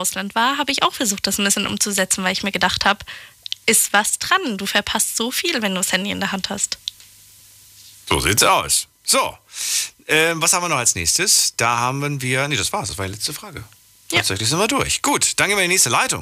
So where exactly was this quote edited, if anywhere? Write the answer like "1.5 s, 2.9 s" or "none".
none